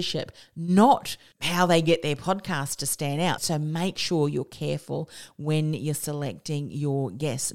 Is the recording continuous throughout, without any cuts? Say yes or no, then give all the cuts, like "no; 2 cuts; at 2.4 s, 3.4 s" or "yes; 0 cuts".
no; 1 cut; at 3.4 s